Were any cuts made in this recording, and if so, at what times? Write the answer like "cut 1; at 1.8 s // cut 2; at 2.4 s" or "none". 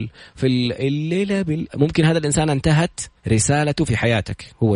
cut 1; at 1.7 s // cut 2; at 3.2 s